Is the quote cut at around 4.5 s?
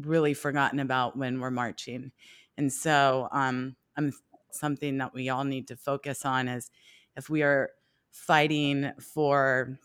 yes; 1 cut; at 4.5 s

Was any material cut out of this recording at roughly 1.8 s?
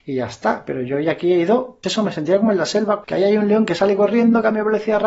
yes; 2 cuts; at 1.8 s, 3.0 s

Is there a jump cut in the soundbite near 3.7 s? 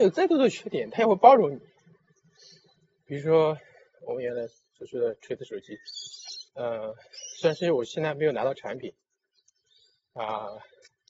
no; 1 cut; at 6.5 s

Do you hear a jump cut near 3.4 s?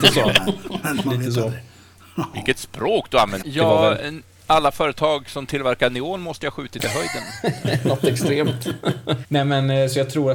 yes; 2 cuts; at 3.4 s, 9.2 s

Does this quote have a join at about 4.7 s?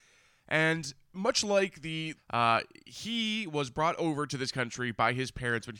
no; 1 cut; at 2.2 s

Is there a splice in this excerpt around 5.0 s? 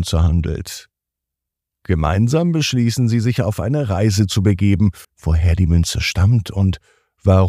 yes; 1 cut; at 5.0 s

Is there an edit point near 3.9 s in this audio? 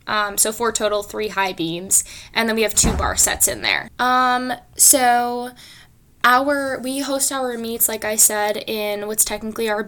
yes; 1 cut; at 3.9 s

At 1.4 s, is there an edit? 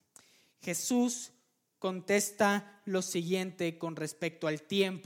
no; 0 cuts

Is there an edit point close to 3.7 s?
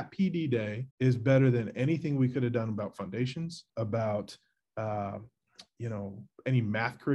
yes; 2 cuts; at 0.9 s, 3.7 s

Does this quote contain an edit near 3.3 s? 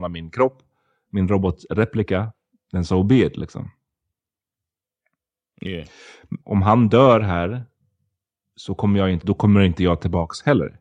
no; 2 cuts; at 6.4 s, 9.2 s

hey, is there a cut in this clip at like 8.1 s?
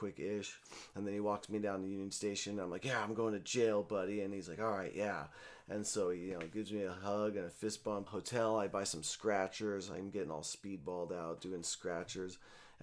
yes; 1 cut; at 8.1 s

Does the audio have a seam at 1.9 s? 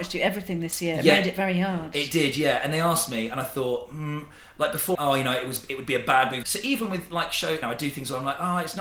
no; 3 cuts; at 4.9 s, 6.4 s, 7.6 s

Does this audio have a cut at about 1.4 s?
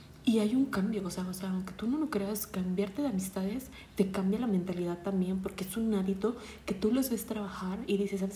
no; 0 cuts

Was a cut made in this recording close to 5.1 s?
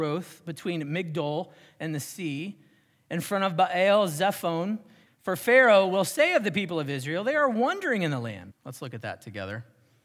yes; 2 cuts; at 5.1 s, 8.5 s

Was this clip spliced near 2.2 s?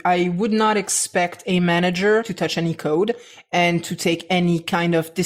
yes; 1 cut; at 2.2 s

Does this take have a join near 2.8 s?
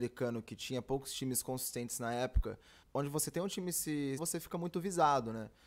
yes; 2 cuts; at 2.8 s, 4.2 s

